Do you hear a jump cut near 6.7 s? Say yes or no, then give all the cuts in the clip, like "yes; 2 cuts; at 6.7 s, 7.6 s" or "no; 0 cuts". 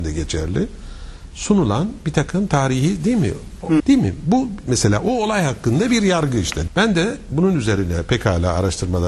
yes; 2 cuts; at 3.8 s, 6.7 s